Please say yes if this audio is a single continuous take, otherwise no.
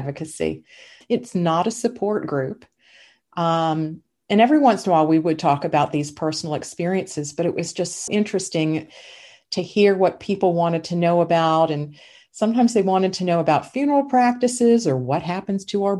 no